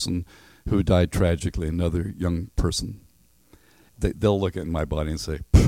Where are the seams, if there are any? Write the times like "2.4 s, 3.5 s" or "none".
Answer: 3.9 s